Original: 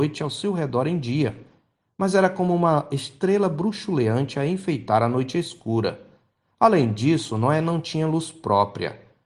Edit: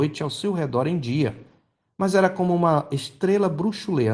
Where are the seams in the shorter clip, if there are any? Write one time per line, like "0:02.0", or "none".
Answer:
none